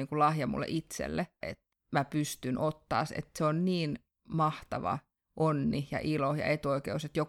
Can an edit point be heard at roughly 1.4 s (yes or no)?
yes